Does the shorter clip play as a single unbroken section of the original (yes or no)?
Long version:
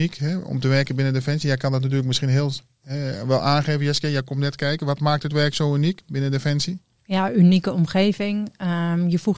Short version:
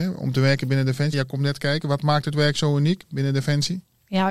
no